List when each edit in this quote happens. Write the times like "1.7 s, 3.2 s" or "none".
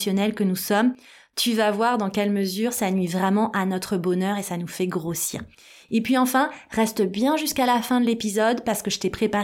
none